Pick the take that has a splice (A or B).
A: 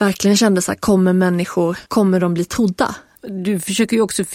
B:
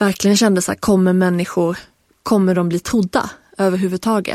A